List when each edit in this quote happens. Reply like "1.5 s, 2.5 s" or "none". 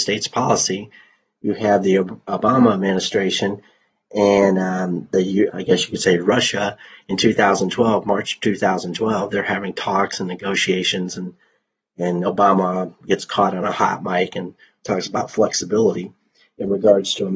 5.5 s